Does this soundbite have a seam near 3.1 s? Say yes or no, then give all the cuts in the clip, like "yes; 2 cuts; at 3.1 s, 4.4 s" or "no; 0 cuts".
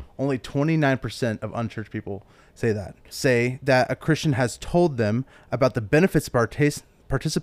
yes; 1 cut; at 3.1 s